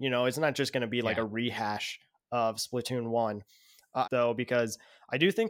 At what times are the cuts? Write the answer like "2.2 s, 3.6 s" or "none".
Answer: 4.0 s